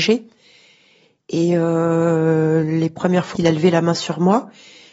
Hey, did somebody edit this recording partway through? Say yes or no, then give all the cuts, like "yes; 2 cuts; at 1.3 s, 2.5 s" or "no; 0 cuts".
yes; 1 cut; at 3.4 s